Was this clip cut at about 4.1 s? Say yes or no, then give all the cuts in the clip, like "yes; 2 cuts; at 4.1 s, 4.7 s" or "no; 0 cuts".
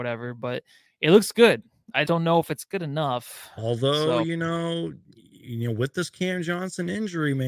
no; 1 cut; at 2.0 s